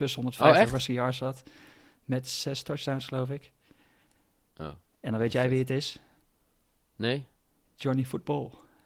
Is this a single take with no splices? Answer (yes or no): yes